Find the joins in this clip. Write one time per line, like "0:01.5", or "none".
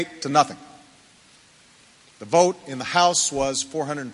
none

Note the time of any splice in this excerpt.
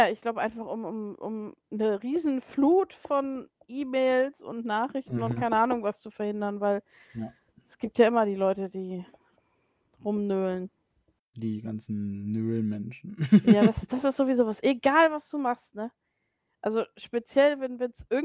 none

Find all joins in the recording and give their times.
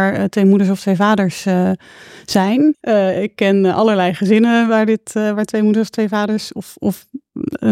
0:02.8

